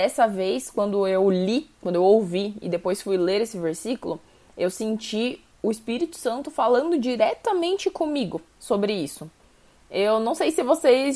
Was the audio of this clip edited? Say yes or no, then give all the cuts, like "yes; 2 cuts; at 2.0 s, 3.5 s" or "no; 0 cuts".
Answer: yes; 1 cut; at 1.7 s